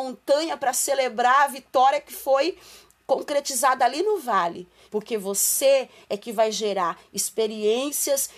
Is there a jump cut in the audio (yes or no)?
yes